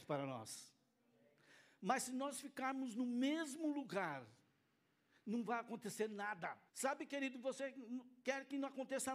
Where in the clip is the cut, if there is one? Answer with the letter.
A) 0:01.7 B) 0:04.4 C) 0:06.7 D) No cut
C